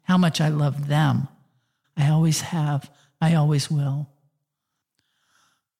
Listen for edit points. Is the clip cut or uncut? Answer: cut